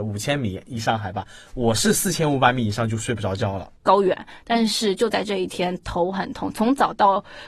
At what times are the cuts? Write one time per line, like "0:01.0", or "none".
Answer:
0:03.8